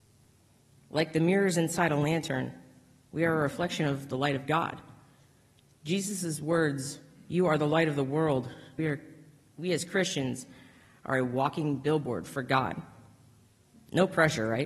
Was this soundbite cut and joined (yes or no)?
yes